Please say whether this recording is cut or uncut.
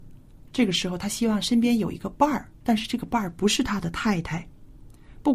uncut